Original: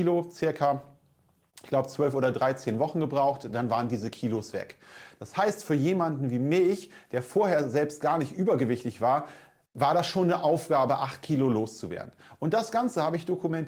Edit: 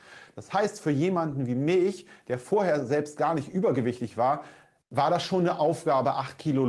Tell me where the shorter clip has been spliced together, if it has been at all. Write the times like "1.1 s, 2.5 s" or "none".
none